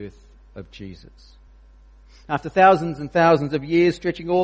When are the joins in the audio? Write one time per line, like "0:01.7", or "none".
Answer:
none